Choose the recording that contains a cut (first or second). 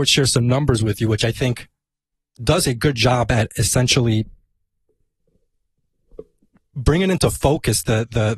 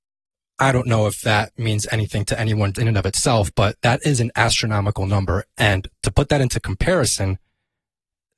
second